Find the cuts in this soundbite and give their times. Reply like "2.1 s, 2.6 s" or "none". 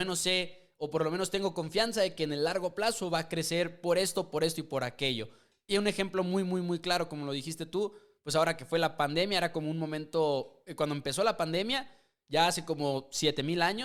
none